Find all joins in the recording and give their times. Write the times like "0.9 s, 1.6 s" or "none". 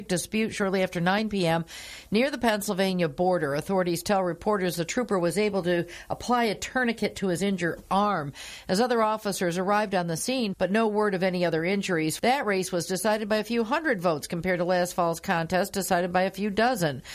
10.5 s, 12.2 s